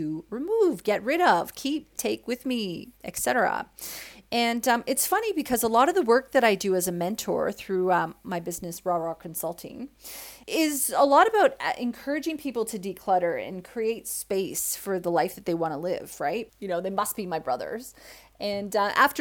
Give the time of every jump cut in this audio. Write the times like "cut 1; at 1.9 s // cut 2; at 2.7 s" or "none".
cut 1; at 10.4 s // cut 2; at 16.5 s